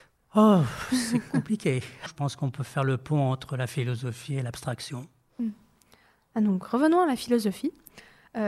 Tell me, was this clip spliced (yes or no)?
yes